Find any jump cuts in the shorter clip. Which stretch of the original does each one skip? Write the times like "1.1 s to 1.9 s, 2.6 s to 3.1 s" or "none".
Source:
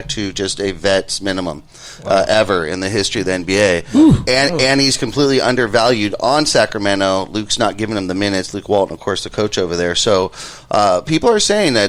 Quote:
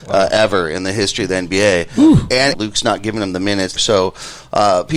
4.5 s to 7.3 s, 8.5 s to 9.9 s